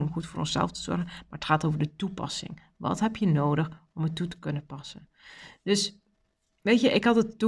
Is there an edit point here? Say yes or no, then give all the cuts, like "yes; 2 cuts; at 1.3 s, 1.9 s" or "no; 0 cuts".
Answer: no; 0 cuts